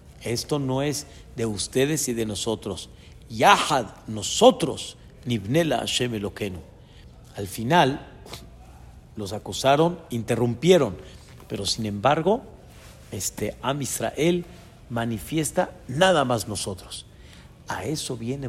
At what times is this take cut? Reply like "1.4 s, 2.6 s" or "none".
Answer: none